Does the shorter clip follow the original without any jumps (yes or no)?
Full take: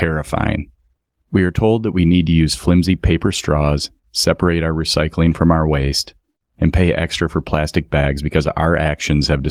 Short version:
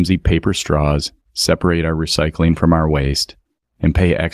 yes